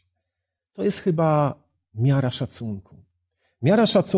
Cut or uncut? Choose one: uncut